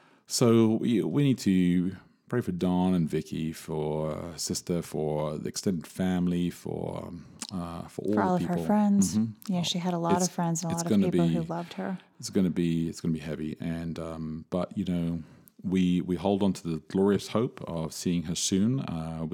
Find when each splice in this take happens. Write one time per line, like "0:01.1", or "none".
none